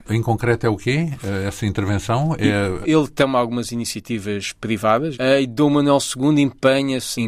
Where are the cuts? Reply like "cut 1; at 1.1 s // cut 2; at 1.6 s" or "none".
cut 1; at 2.8 s // cut 2; at 5.1 s